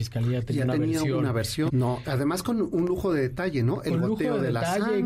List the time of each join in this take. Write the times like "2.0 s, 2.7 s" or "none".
1.7 s